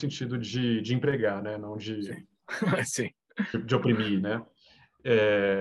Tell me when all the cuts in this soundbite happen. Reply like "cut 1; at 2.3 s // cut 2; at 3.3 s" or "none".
none